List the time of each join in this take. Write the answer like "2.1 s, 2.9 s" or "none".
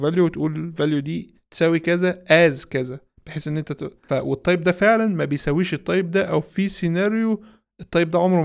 4.1 s